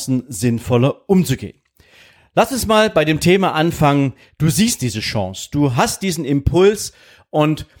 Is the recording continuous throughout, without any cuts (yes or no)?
yes